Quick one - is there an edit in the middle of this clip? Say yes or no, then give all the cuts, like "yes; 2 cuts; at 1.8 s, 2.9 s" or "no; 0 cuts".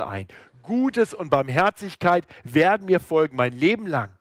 no; 0 cuts